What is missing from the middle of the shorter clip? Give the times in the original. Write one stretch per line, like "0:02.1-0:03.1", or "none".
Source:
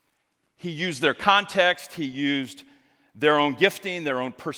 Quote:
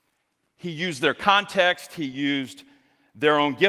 none